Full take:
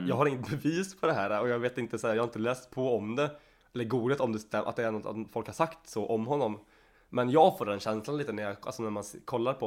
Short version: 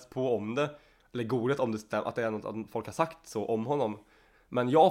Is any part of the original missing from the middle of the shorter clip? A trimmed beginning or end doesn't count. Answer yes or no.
no